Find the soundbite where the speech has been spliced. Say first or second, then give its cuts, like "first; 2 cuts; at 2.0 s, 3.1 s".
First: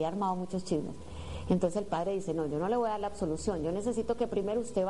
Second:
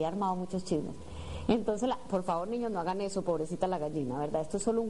second; 1 cut; at 1.4 s